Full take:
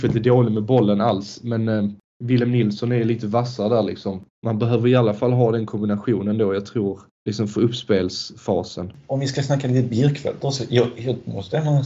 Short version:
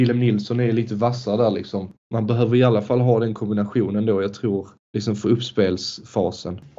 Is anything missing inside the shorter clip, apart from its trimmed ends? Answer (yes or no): no